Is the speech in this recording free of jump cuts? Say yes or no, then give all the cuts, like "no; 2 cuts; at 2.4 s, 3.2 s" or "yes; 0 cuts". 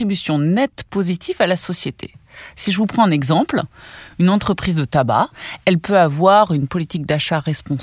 yes; 0 cuts